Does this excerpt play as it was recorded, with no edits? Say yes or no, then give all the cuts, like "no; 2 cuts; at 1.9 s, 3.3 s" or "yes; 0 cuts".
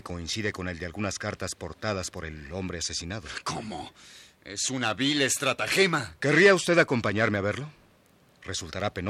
yes; 0 cuts